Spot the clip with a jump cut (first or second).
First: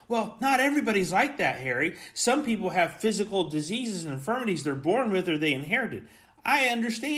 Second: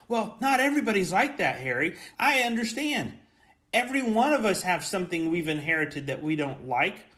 second